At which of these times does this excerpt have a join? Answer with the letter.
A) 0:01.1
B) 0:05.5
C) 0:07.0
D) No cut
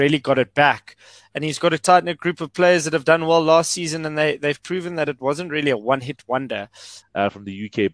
C